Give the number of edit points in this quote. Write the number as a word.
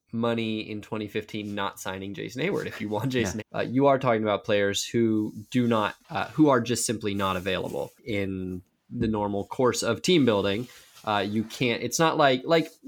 one